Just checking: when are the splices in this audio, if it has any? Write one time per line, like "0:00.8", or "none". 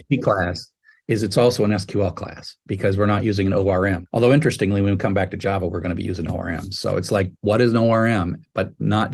none